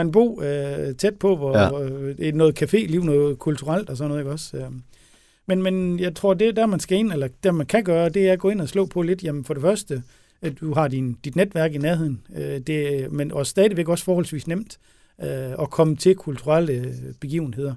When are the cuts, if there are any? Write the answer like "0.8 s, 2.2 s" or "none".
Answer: 10.6 s